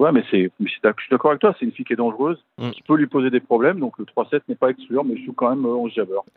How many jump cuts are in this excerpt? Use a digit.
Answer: 0